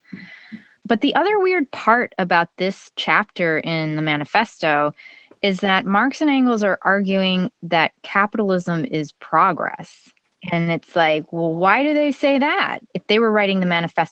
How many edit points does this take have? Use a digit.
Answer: 1